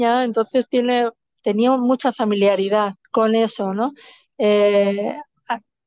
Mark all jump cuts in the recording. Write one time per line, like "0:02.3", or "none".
0:03.0